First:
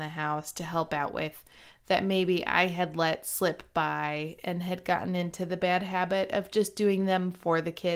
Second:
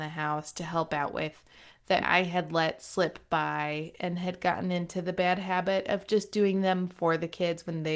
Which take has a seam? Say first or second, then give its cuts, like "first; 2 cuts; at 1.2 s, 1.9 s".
second; 1 cut; at 2.0 s